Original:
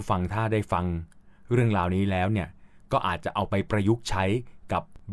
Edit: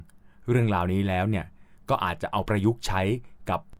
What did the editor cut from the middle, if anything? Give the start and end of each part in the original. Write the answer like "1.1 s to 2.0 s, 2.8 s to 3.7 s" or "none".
3.5 s to 3.7 s